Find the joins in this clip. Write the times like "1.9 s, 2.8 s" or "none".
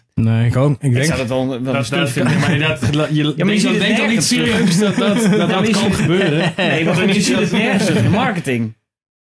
none